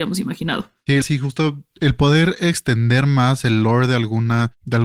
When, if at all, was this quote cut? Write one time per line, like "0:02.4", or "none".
0:01.0